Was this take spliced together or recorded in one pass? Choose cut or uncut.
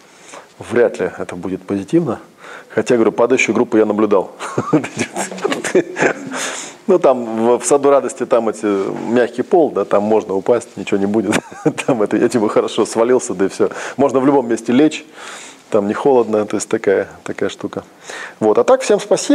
uncut